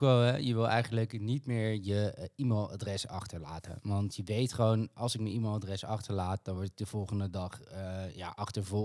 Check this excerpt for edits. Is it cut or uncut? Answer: uncut